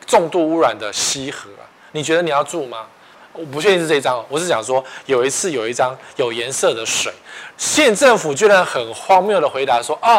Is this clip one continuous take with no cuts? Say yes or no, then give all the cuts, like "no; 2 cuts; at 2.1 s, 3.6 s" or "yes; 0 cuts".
no; 2 cuts; at 3.1 s, 7.5 s